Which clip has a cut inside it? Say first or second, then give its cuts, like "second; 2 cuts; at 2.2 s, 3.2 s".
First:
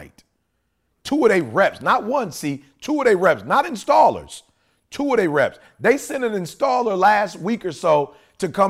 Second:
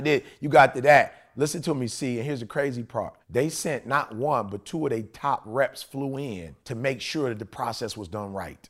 second; 2 cuts; at 3.2 s, 6.6 s